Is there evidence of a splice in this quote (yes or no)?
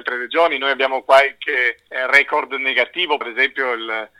yes